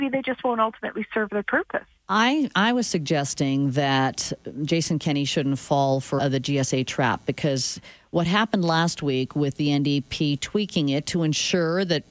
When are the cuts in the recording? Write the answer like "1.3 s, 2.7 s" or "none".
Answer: 2.0 s, 6.2 s